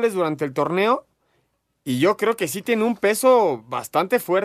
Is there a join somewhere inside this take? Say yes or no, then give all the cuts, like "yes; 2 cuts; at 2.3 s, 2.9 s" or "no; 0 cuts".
no; 0 cuts